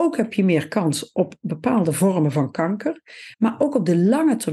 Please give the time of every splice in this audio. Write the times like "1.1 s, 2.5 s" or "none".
3.3 s